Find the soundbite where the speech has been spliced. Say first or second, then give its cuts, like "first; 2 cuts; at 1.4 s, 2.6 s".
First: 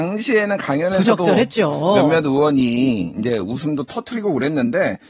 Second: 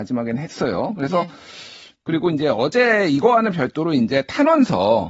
second; 1 cut; at 1.9 s